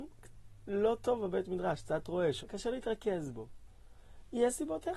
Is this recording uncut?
no; 1 cut; at 2.4 s

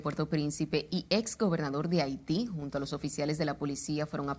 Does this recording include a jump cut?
no; 0 cuts

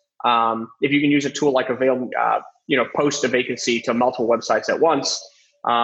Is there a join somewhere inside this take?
yes; 1 cut; at 2.1 s

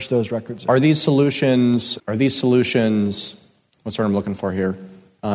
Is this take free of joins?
no; 1 cut; at 2.0 s

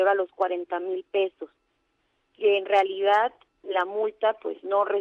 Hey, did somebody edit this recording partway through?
no; 0 cuts

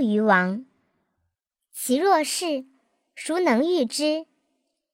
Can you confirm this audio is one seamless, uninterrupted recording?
yes; 0 cuts

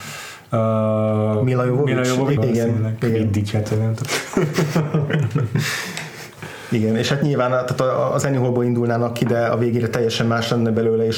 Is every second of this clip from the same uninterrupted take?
no; 1 cut; at 2.4 s

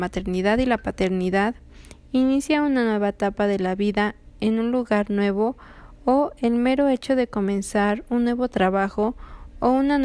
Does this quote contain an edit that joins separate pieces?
no; 0 cuts

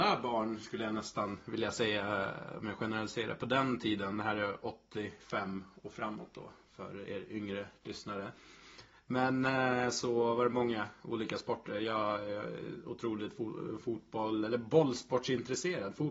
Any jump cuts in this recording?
no; 0 cuts

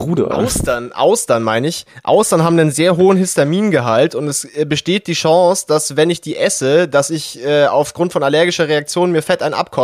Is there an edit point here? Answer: no; 0 cuts

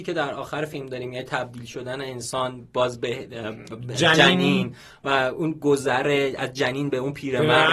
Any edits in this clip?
no; 0 cuts

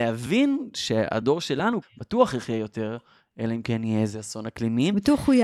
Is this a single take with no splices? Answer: no; 1 cut; at 1.8 s

